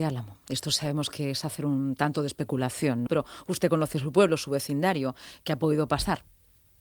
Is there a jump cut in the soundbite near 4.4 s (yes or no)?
no